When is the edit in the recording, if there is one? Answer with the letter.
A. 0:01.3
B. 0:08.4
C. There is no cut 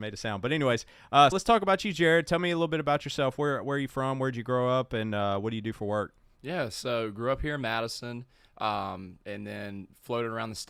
A